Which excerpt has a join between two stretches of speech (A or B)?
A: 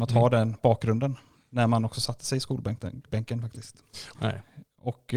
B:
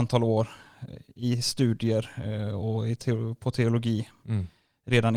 A